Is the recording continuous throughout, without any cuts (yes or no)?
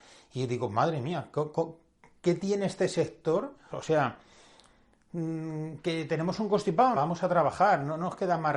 no